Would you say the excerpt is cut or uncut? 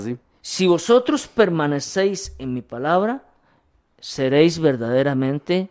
uncut